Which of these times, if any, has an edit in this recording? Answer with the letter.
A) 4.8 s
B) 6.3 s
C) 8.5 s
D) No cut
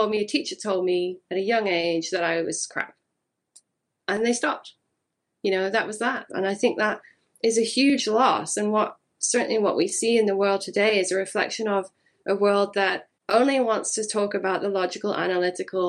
B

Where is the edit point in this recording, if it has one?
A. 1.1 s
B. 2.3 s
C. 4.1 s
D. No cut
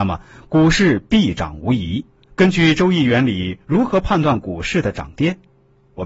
B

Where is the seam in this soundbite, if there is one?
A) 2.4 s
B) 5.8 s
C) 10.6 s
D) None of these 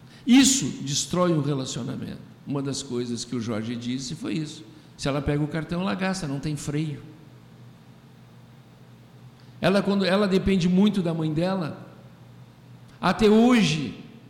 A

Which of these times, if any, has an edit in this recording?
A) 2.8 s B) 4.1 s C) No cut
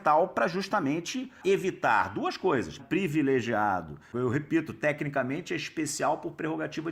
A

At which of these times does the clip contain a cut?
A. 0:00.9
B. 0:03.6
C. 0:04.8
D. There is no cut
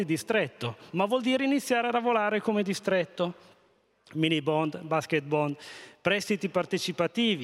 A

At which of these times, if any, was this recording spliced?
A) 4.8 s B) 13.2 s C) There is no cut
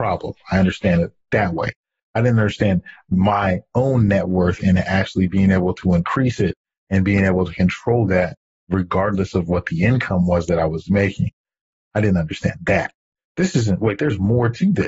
B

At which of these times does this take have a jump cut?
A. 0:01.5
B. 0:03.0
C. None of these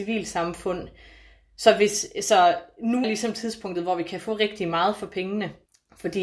B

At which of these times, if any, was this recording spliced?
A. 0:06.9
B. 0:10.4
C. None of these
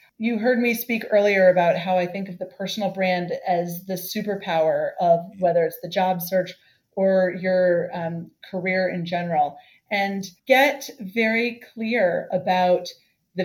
B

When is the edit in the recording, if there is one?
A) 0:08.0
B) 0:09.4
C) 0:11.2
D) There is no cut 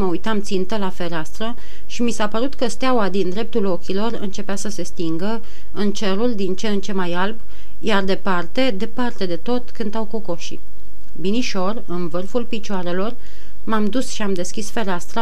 D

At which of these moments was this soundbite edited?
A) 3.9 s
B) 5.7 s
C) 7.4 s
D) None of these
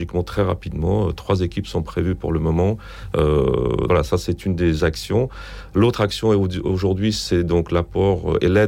A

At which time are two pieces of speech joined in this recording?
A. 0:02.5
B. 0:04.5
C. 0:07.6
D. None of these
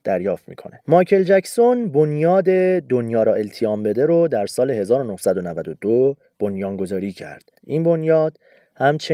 C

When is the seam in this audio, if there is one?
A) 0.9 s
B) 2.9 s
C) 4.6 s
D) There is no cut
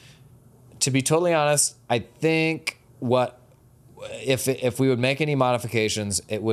B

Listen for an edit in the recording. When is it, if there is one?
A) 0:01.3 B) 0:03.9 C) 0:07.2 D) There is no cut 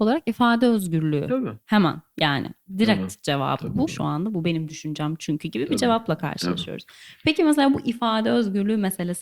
B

